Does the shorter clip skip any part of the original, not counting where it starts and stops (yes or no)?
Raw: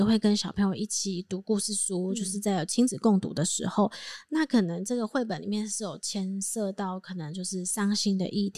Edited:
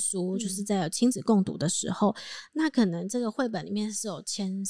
no